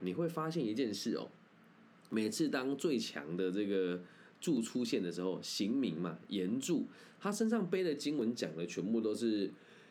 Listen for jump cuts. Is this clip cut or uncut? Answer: uncut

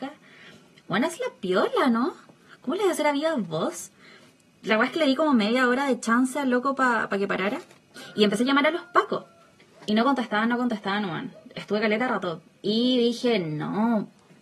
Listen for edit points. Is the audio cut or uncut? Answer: uncut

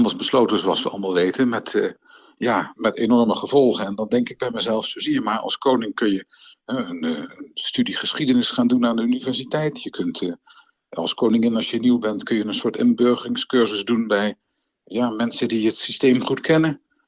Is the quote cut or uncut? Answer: cut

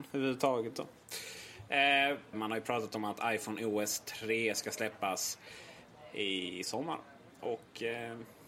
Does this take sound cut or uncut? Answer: cut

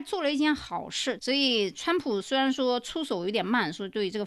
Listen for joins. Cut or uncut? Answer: cut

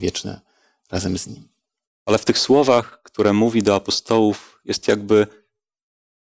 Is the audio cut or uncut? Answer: cut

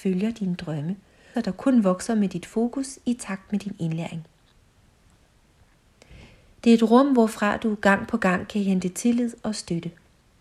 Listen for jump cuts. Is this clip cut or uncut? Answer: cut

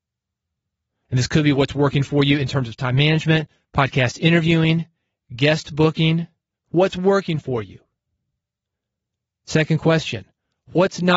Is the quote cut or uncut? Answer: cut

